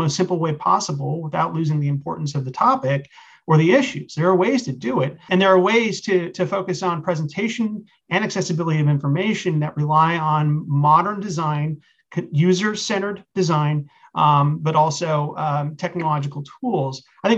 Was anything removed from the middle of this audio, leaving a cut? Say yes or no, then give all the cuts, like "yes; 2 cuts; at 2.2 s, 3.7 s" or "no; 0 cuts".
no; 0 cuts